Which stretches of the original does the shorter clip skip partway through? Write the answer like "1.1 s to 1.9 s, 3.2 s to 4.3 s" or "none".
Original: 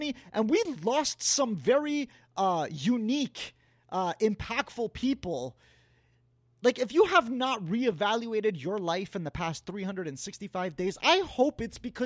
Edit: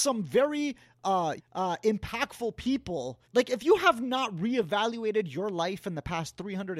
2.7 s to 3.7 s, 5.6 s to 6.5 s